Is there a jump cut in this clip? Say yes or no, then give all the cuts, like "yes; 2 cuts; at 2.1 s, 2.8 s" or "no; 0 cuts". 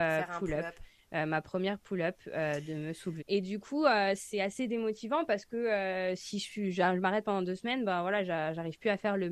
yes; 1 cut; at 3.2 s